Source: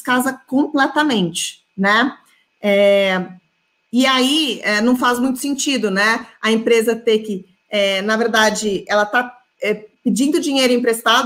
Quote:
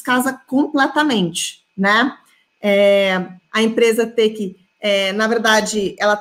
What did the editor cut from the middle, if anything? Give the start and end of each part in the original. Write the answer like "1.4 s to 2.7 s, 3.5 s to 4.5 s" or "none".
3.5 s to 6.4 s